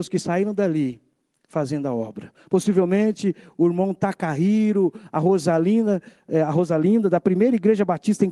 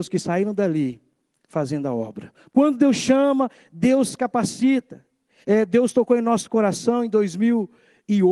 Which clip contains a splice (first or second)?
second